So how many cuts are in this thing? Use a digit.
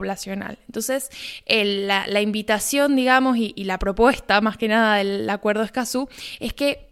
0